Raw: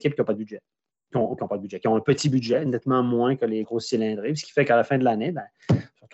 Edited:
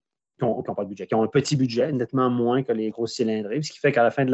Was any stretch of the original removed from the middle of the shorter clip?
no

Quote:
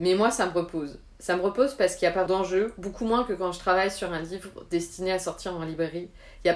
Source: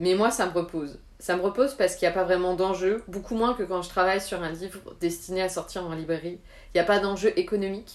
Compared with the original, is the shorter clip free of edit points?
no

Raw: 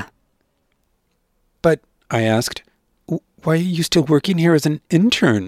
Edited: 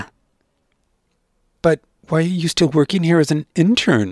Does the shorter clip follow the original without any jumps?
no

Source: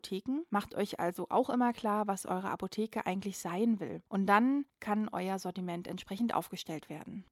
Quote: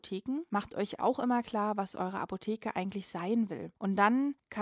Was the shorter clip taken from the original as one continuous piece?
no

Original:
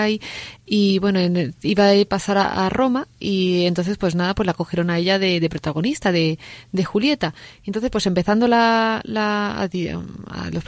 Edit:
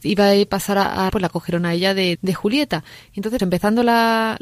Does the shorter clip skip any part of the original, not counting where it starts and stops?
yes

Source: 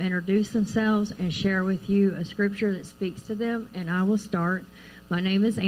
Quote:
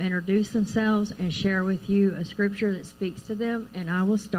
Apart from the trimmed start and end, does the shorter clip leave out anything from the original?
no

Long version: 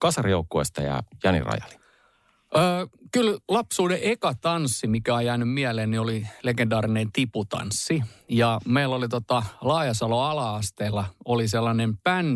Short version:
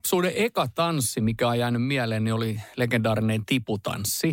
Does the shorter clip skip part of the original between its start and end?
no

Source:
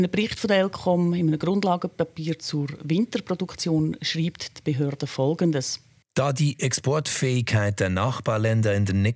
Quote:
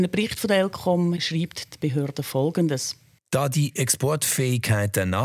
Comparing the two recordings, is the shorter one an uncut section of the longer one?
no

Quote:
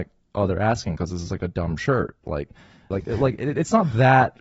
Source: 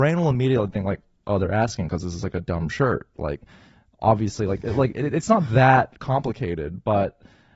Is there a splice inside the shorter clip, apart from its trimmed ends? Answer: yes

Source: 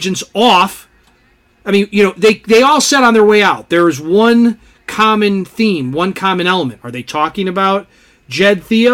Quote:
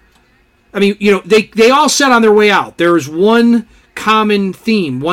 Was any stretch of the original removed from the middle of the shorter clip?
no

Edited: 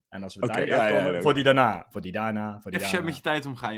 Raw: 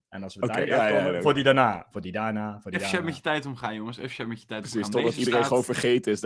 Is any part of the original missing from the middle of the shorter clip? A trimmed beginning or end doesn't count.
no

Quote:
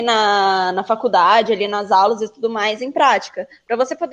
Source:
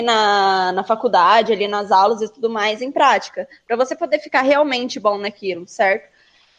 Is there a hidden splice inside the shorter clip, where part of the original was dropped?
no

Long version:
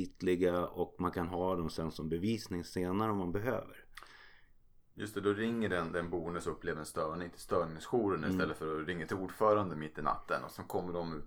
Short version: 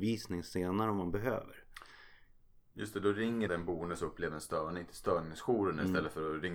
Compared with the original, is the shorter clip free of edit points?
no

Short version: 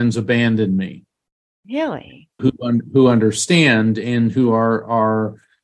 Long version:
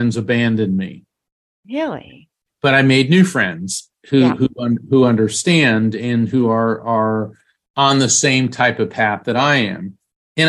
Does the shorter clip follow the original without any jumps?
no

